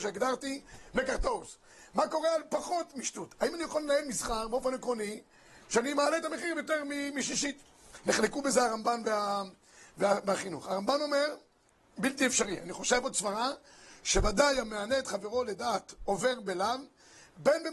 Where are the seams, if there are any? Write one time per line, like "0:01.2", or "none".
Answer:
none